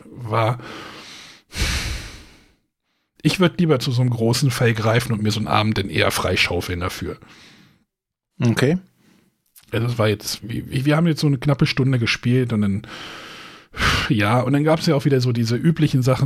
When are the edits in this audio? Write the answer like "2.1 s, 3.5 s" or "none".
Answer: 10.4 s

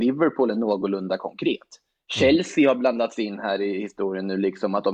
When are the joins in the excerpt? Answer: none

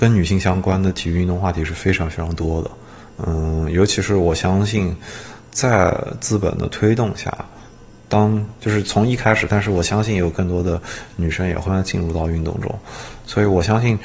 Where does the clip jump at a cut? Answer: 9.5 s, 11.7 s

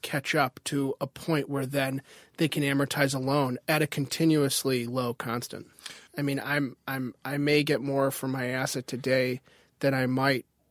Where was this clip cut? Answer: 6.1 s

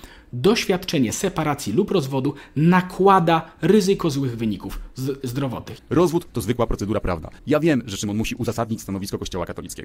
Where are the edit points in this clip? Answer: 5.8 s, 7.4 s

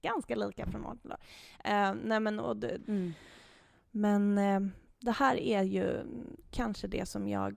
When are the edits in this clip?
2.8 s

